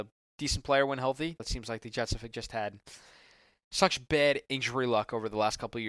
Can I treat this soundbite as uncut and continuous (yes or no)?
no